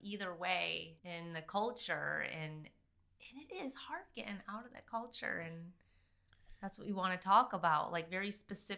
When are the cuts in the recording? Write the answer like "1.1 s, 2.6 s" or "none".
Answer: 1.0 s